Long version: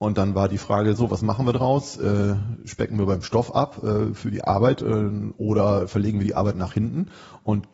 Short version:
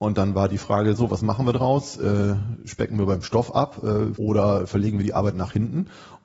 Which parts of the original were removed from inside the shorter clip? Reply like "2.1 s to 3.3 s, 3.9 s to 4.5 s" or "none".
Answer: 4.2 s to 5.4 s